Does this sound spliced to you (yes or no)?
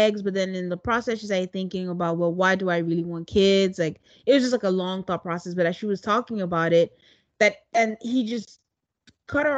no